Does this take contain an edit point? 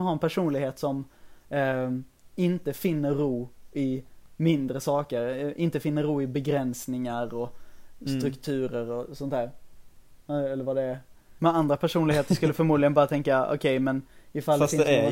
yes; 2 cuts; at 10.2 s, 11.4 s

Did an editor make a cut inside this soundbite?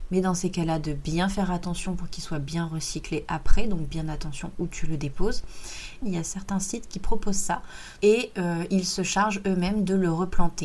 yes; 2 cuts; at 6.0 s, 8.0 s

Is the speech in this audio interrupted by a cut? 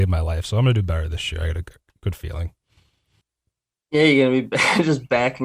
no; 0 cuts

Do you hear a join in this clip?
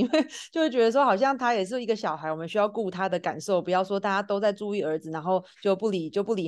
no; 0 cuts

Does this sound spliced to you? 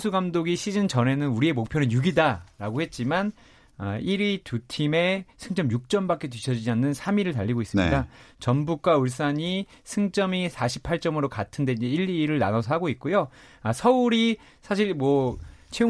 yes; 1 cut; at 8.3 s

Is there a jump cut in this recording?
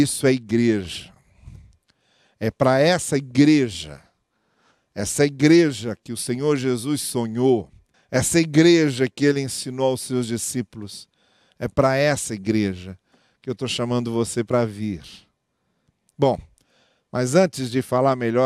yes; 1 cut; at 7.9 s

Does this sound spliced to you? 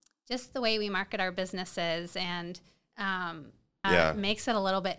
yes; 1 cut; at 3.8 s

